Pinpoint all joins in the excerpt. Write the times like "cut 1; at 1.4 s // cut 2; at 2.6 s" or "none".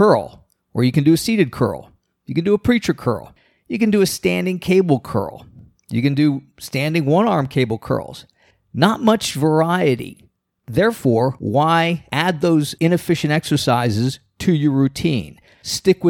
none